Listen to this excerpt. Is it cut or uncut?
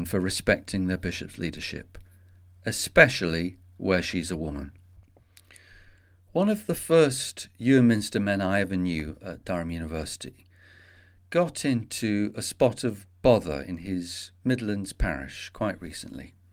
uncut